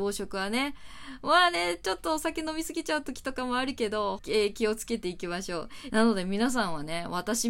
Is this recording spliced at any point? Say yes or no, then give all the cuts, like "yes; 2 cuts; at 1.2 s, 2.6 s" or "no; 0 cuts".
yes; 2 cuts; at 4.2 s, 5.9 s